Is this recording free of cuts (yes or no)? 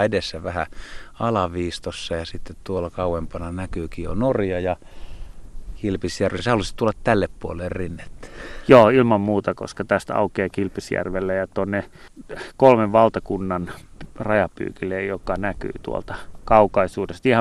yes